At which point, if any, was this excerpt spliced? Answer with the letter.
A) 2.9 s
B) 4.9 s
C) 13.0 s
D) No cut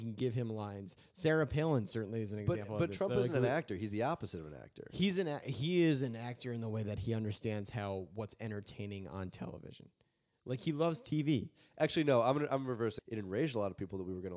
C